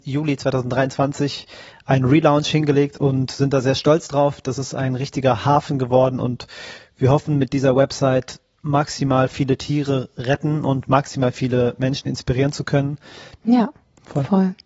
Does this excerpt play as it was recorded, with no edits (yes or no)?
no